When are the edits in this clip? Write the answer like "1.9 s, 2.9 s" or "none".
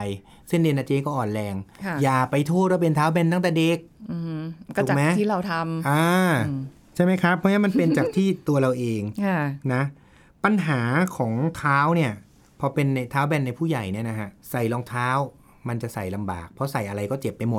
14.4 s